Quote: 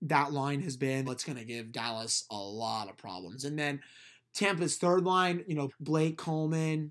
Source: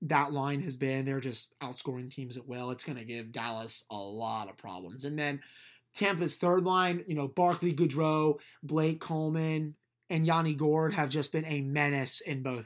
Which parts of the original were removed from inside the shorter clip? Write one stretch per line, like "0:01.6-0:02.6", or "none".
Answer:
0:01.1-0:02.7
0:07.3-0:08.5